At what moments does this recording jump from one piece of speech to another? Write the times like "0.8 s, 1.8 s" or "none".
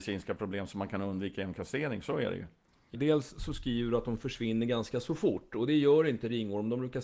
2.9 s